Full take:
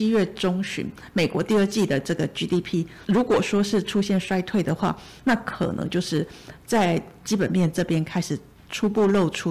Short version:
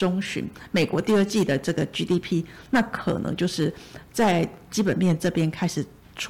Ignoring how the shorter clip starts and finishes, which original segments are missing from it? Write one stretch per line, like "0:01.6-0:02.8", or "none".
0:03.0-0:05.2